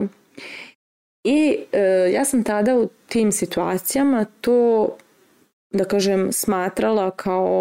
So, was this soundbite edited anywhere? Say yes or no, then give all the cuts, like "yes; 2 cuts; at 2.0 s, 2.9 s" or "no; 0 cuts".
no; 0 cuts